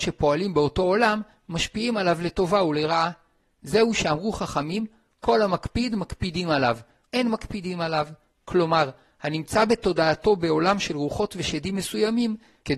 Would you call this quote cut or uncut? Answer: cut